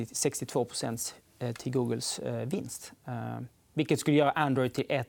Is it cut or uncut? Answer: uncut